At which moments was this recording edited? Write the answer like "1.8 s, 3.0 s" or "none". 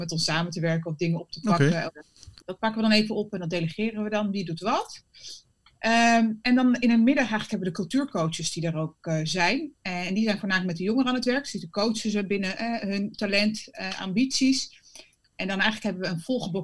2.4 s